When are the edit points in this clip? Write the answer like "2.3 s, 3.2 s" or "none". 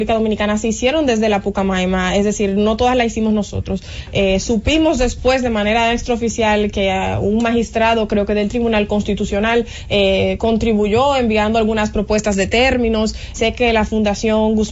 13.3 s